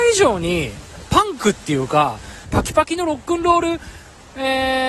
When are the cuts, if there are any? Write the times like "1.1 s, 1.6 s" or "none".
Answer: 1.1 s, 2.4 s